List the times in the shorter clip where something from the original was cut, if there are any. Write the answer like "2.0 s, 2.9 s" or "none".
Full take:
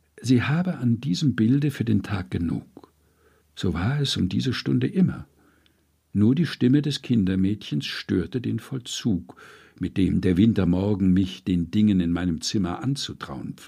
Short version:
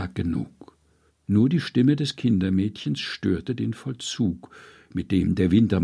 1.1 s